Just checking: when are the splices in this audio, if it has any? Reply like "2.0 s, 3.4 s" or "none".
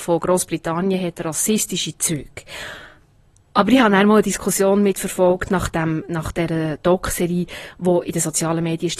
none